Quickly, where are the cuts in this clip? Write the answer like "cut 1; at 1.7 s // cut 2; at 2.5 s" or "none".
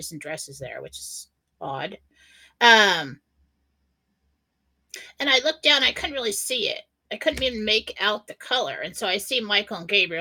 none